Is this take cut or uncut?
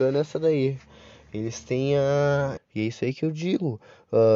cut